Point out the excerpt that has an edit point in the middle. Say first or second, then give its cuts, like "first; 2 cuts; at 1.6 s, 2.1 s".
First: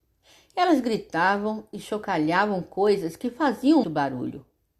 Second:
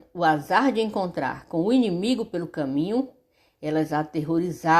first; 1 cut; at 3.8 s